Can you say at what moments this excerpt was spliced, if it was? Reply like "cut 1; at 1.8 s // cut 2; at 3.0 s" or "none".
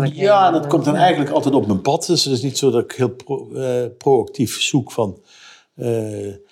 none